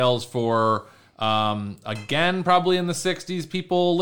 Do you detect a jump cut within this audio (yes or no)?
no